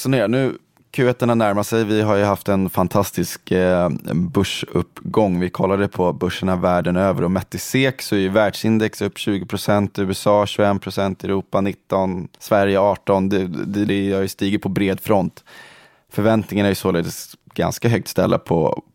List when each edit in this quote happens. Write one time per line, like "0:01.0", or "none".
0:12.3
0:13.9